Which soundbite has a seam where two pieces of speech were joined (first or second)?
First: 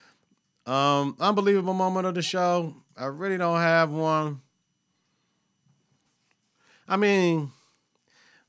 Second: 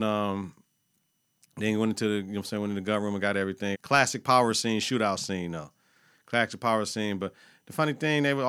second